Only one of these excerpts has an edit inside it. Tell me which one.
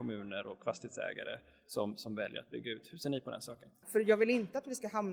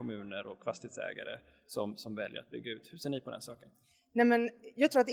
first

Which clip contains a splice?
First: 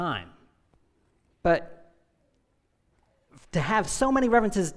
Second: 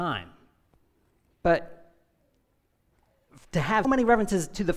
second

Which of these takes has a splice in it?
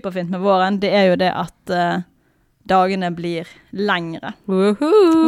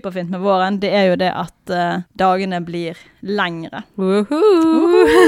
second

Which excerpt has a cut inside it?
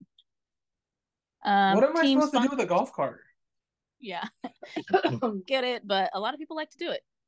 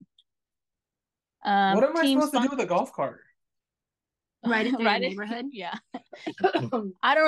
first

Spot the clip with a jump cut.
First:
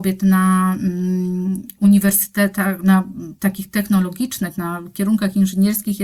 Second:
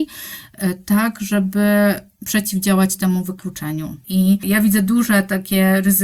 second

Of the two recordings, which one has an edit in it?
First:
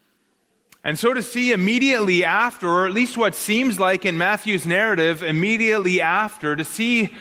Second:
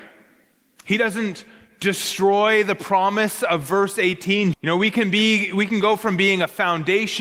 second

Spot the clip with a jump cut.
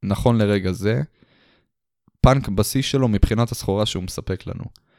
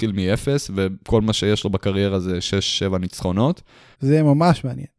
second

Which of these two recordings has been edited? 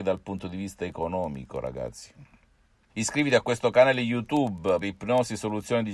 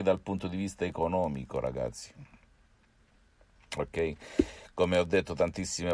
first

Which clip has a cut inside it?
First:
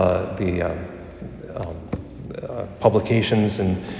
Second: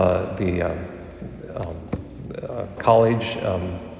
second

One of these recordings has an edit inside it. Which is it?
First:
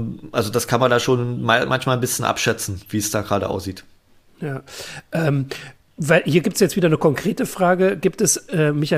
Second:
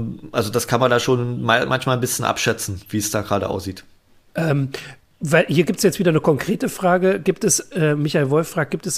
second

